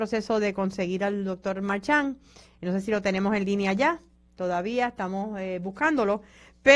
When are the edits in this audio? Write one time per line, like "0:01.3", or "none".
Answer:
none

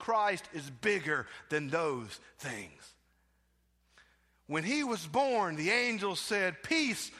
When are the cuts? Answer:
none

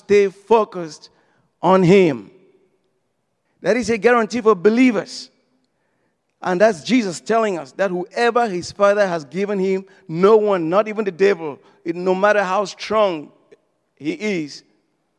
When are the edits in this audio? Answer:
0:03.5

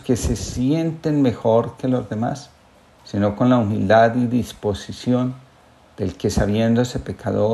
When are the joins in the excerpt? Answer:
none

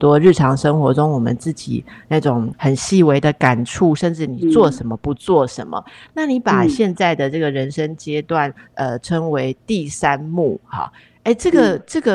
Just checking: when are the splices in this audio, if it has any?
none

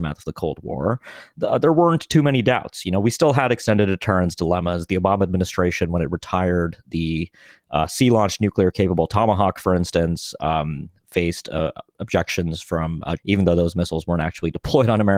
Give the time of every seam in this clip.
0:13.2

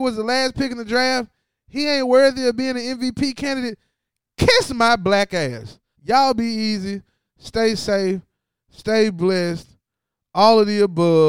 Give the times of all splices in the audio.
0:05.9

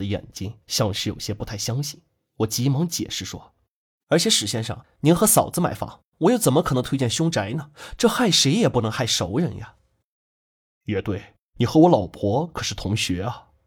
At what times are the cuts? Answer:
none

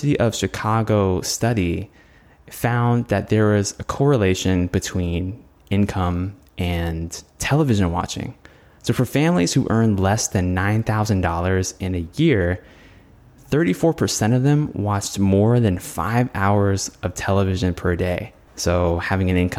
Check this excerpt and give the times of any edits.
0:18.5

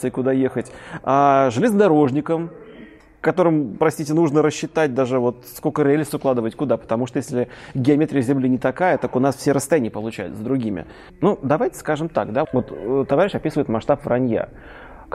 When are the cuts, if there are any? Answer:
0:11.1
0:12.4

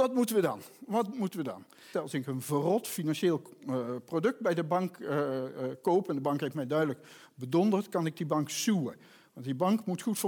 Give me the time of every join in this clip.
0:01.9

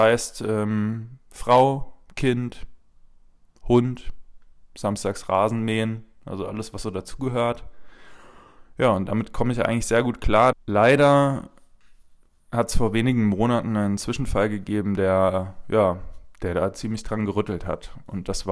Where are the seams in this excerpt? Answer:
0:10.5

